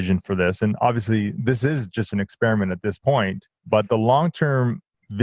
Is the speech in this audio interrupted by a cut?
yes; 1 cut; at 3.6 s

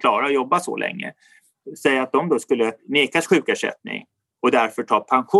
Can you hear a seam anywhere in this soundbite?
no; 0 cuts

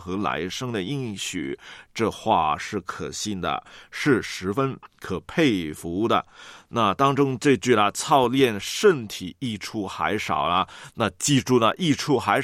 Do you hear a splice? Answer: no; 0 cuts

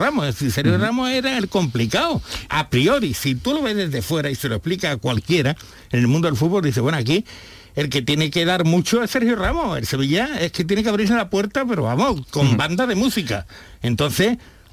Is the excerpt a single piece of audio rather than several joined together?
yes; 0 cuts

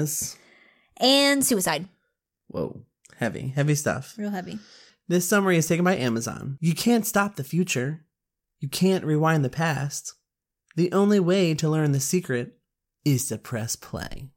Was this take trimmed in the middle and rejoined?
no; 0 cuts

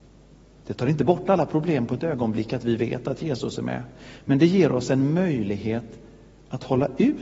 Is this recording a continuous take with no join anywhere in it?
yes; 0 cuts

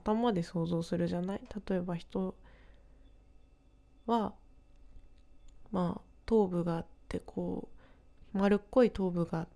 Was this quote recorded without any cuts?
yes; 0 cuts

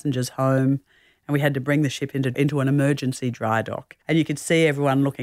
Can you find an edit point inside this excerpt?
yes; 2 cuts; at 2.3 s, 4.0 s

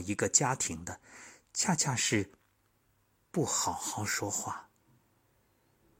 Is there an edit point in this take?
no; 0 cuts

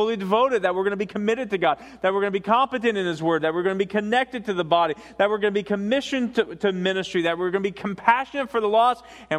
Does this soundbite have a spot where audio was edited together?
no; 0 cuts

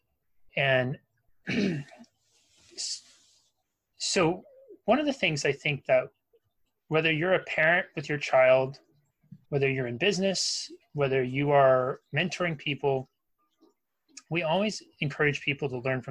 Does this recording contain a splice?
yes; 1 cut; at 9.4 s

